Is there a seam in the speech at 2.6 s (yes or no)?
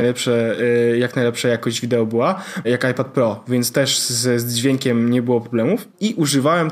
yes